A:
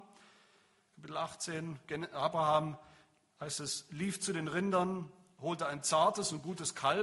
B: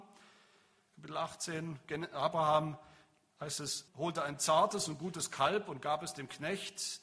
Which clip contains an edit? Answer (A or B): B